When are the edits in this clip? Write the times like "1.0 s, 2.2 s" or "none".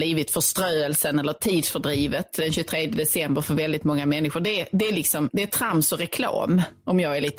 none